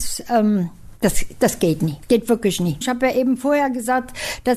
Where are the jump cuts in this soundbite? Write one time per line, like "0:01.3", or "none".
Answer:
0:02.8

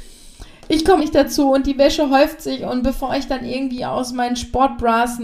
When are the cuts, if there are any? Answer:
0:01.0

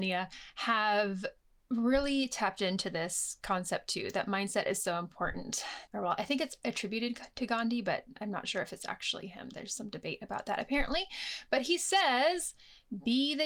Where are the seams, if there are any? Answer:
0:05.9

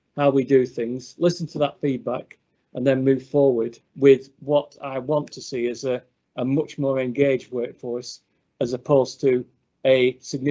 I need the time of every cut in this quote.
none

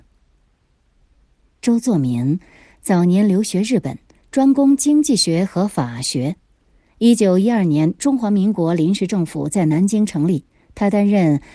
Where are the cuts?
none

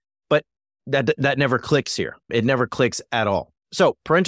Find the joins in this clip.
none

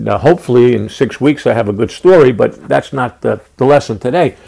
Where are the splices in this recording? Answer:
none

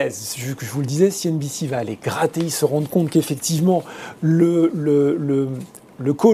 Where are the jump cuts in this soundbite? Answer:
none

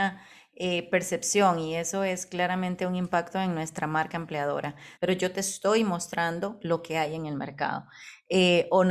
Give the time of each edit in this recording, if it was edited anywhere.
0:05.0

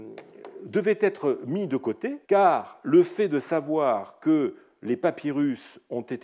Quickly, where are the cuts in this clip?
0:02.2

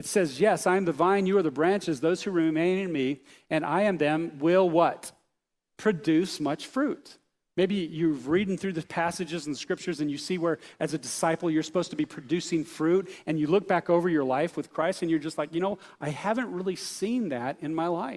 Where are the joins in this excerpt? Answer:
0:07.5

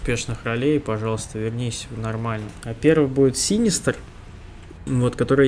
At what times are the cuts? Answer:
0:02.6

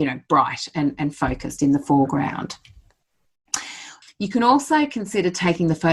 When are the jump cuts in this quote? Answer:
0:04.0

